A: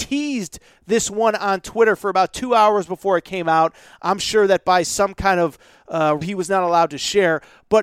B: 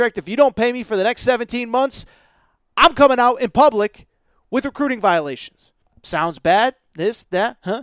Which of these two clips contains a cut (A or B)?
A